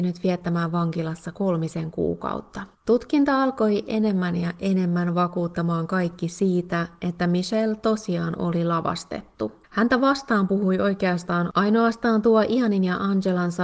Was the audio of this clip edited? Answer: yes; 2 cuts; at 2.7 s, 9.6 s

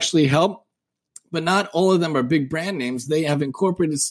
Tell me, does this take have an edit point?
yes; 1 cut; at 3.1 s

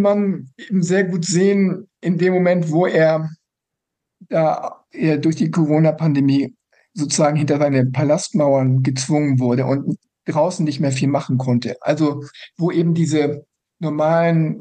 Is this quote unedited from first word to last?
yes; 0 cuts

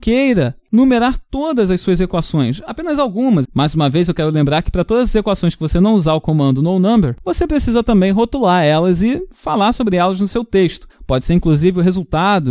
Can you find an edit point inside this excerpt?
yes; 2 cuts; at 3.4 s, 10.9 s

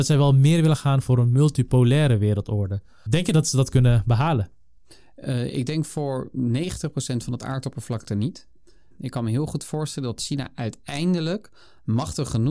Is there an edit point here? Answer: yes; 2 cuts; at 3.1 s, 8.9 s

